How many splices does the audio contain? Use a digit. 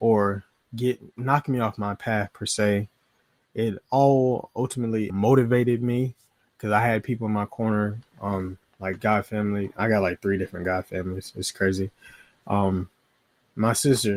1